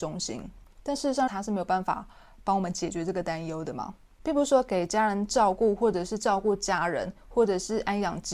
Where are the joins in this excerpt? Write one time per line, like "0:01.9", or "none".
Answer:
0:01.3